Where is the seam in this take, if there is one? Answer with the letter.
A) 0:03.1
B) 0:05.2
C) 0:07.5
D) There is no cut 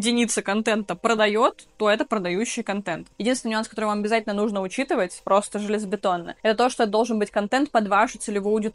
D